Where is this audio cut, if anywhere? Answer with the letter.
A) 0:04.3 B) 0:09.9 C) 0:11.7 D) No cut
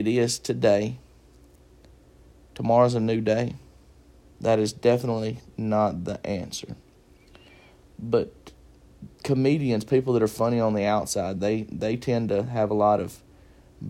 A